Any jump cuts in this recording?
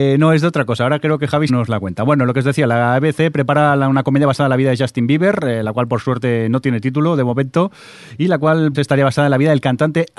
yes; 2 cuts; at 1.5 s, 8.7 s

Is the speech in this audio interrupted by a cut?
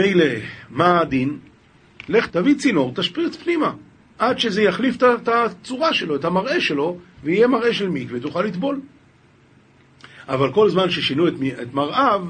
yes; 1 cut; at 2.3 s

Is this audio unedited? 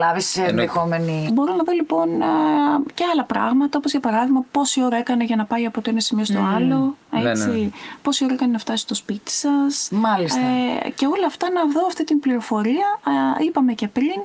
no; 1 cut; at 1.3 s

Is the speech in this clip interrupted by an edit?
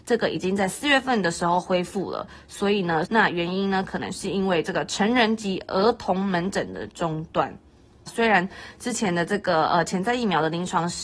yes; 2 cuts; at 3.0 s, 8.1 s

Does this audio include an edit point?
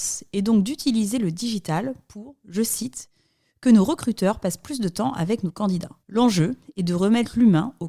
yes; 1 cut; at 6.0 s

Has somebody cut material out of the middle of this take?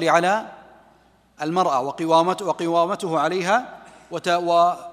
no; 0 cuts

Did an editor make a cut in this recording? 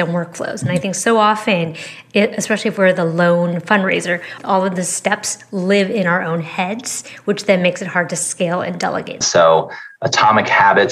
yes; 1 cut; at 9.2 s

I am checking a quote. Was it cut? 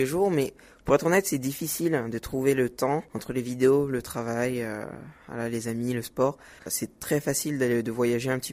yes; 1 cut; at 6.6 s

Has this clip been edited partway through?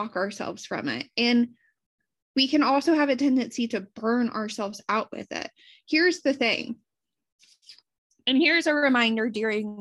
no; 0 cuts

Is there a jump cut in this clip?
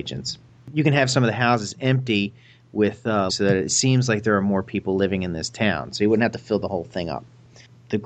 yes; 1 cut; at 3.3 s

